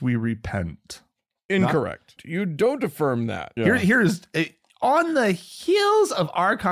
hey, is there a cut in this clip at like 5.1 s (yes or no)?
no